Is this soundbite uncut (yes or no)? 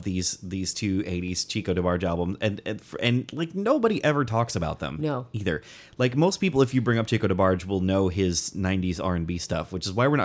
yes